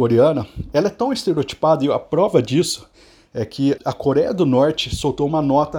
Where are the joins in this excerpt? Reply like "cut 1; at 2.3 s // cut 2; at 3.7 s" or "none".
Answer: cut 1; at 3.8 s